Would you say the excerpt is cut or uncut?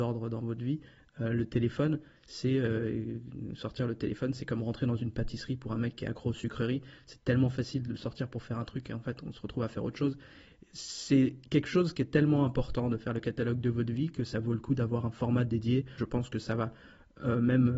cut